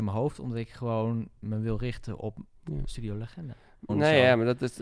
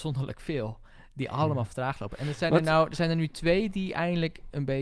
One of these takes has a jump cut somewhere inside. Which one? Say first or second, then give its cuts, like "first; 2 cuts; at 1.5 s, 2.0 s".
first; 1 cut; at 3.9 s